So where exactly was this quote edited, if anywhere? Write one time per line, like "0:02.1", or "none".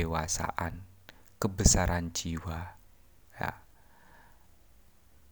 none

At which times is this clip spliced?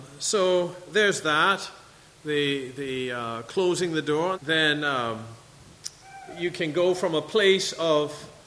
0:04.3

